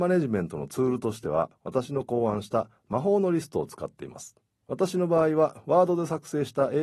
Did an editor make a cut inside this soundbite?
yes; 1 cut; at 4.6 s

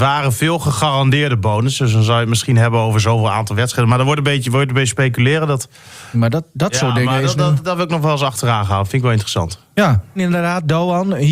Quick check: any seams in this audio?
yes; 2 cuts; at 6.1 s, 10.2 s

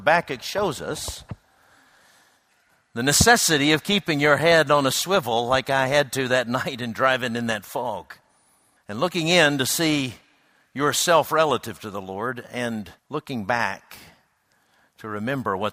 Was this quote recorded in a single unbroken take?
no; 2 cuts; at 8.8 s, 13.0 s

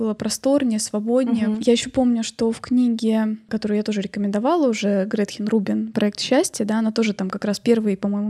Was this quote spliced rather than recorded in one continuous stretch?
no; 0 cuts

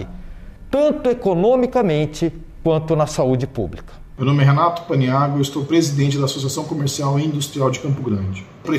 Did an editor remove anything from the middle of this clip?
no; 0 cuts

